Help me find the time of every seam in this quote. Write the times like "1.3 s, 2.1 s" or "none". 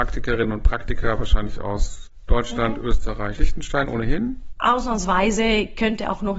3.3 s, 4.5 s